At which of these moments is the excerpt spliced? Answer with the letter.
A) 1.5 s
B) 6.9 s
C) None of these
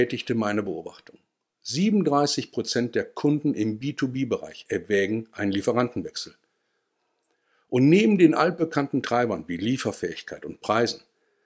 C